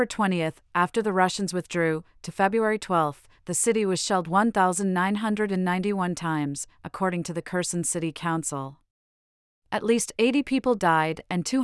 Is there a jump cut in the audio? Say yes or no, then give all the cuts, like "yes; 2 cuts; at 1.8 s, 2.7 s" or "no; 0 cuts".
no; 0 cuts